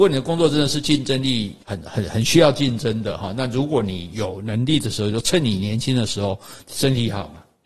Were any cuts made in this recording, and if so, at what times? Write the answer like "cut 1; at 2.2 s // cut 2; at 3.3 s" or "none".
cut 1; at 1.6 s